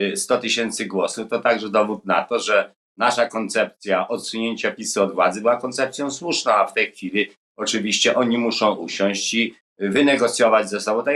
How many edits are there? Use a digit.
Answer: 0